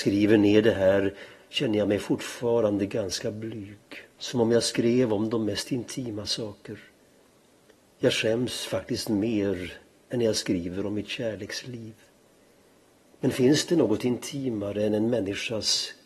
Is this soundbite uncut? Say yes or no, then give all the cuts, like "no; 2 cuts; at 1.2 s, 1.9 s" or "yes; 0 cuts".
yes; 0 cuts